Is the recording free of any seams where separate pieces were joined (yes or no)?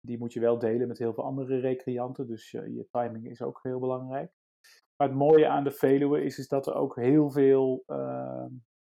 no